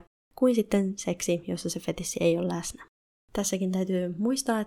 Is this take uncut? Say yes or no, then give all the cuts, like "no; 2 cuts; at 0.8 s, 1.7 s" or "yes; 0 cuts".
yes; 0 cuts